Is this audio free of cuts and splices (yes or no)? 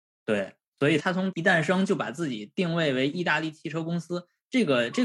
yes